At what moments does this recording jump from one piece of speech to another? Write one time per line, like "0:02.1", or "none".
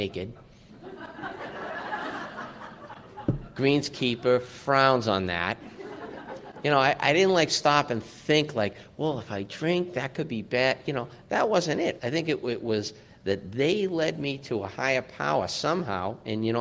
0:12.0